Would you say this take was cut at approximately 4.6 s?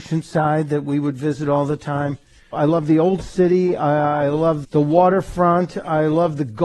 yes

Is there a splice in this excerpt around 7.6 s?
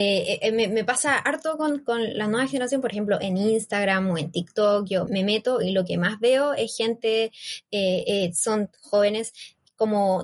no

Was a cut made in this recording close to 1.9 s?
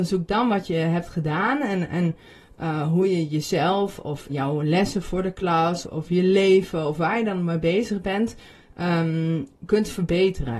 no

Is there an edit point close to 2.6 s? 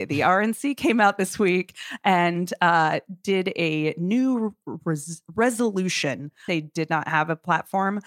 no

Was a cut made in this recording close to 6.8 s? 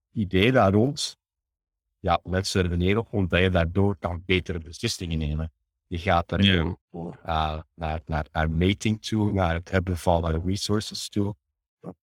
yes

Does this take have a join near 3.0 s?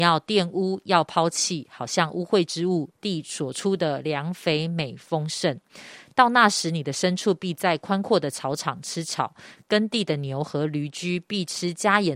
yes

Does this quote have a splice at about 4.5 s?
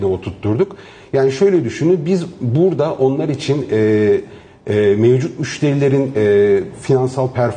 yes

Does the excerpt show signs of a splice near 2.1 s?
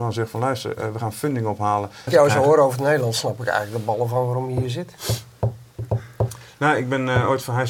yes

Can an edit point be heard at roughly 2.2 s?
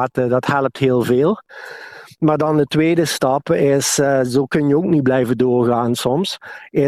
no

